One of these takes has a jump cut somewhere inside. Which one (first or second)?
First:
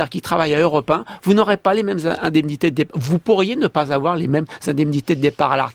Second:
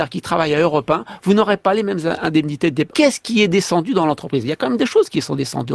second